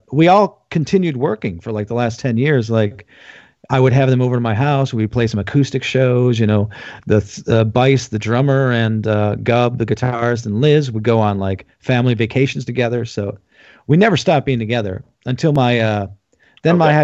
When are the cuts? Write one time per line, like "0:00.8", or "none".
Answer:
none